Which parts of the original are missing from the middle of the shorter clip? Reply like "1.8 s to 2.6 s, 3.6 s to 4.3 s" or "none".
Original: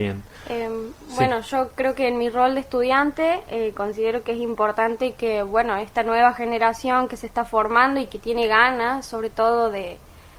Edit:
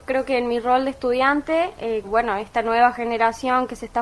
3.7 s to 5.4 s

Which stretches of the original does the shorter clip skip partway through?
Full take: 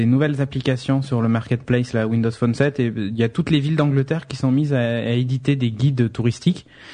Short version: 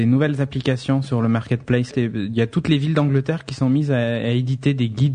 1.9 s to 2.7 s

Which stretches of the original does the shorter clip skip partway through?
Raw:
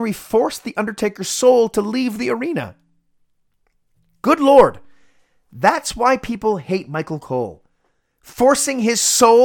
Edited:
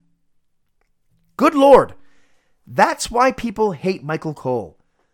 none

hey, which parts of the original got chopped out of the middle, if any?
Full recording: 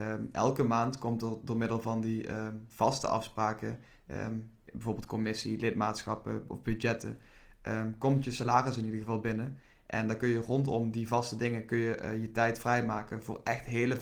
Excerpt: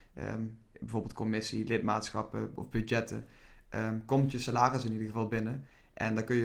none

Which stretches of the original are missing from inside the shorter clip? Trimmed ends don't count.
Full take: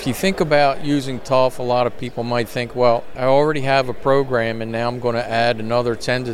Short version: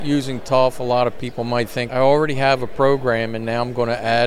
2.7 s to 3.2 s

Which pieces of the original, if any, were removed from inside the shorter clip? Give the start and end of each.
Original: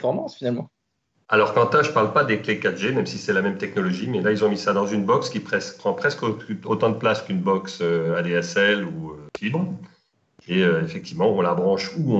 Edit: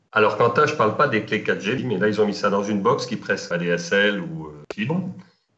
2.9 s to 4.0 s, 5.7 s to 8.1 s

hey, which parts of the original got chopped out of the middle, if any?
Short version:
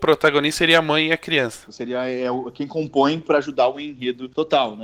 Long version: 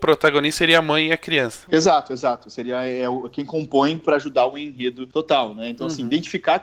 1.7 s to 2.4 s

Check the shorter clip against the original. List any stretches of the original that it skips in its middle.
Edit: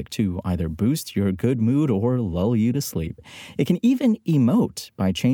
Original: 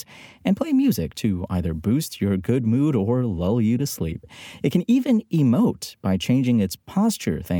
none

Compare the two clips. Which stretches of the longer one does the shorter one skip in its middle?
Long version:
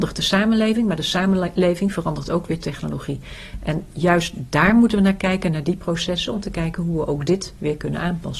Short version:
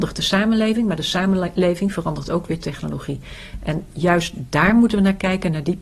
none

